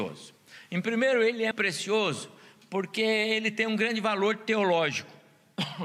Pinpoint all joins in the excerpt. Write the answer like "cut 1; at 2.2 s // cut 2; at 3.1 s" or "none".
cut 1; at 1.5 s